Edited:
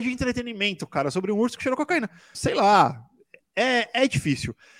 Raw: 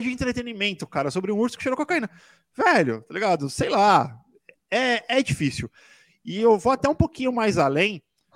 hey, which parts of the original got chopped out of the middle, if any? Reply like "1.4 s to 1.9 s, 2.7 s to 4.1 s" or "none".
2.3 s to 3.5 s